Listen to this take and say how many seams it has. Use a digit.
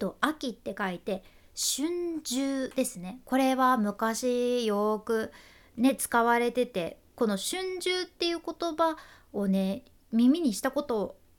0